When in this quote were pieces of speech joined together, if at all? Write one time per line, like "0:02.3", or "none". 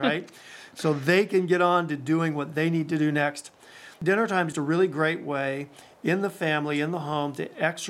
0:04.5